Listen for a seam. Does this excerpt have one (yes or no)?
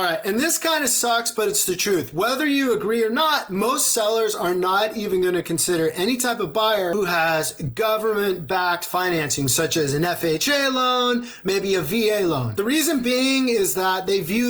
no